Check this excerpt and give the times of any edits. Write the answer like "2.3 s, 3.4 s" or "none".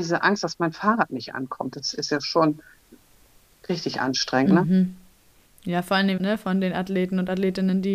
6.2 s